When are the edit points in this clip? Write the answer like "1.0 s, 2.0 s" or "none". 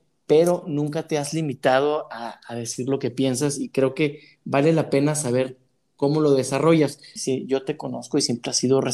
7.2 s